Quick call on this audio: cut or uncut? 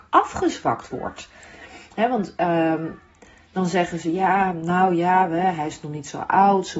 uncut